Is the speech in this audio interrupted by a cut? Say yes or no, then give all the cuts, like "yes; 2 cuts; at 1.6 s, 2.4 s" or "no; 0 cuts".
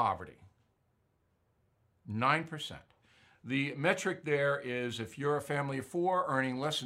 no; 0 cuts